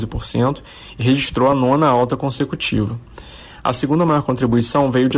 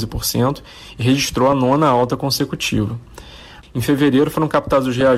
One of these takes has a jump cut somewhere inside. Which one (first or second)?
second